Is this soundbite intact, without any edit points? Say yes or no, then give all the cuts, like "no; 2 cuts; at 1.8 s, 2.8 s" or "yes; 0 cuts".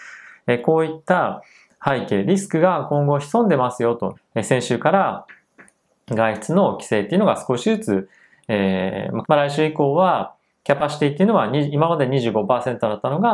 no; 2 cuts; at 4.1 s, 9.2 s